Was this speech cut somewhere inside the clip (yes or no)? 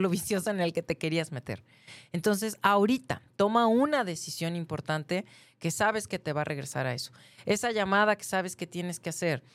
no